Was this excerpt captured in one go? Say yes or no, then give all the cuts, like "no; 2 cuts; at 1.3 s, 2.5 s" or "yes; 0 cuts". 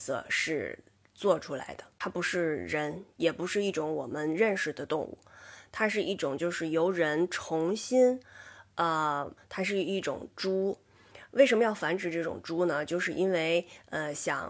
no; 1 cut; at 9.4 s